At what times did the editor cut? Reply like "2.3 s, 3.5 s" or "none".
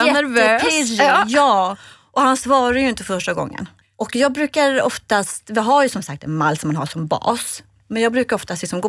3.8 s